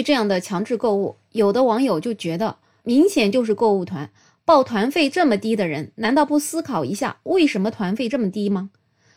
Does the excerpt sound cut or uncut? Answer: cut